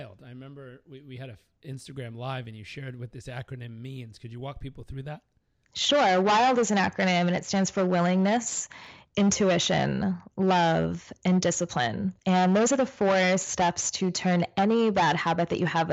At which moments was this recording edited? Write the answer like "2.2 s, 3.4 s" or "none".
12.2 s